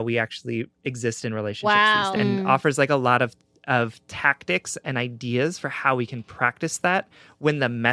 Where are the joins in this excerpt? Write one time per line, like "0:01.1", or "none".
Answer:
0:02.2